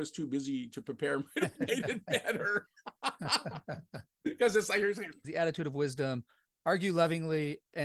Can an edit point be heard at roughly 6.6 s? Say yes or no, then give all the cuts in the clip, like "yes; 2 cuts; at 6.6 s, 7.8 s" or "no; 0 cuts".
no; 1 cut; at 5.2 s